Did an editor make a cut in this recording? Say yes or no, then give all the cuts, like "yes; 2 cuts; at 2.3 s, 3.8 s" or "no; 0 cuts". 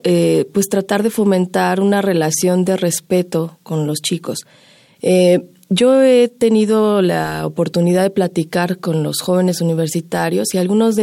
no; 0 cuts